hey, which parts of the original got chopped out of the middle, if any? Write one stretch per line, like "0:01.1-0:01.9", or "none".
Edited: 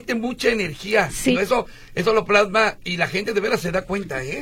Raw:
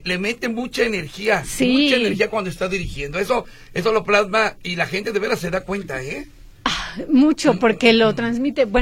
0:01.7-0:03.1